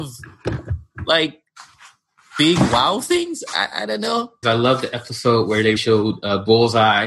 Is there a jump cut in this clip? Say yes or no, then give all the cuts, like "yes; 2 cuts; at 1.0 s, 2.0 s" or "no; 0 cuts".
yes; 2 cuts; at 4.4 s, 5.8 s